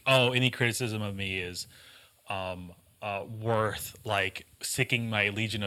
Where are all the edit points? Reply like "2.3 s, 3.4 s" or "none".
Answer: none